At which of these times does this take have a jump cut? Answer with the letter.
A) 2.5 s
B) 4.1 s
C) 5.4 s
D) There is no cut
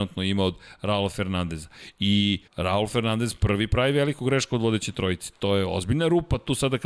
A